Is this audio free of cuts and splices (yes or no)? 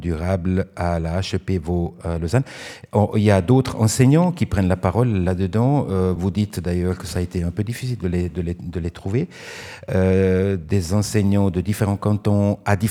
yes